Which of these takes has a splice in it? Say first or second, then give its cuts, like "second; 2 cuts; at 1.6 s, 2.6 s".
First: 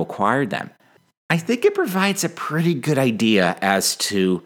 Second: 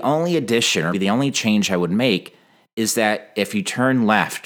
second; 1 cut; at 0.9 s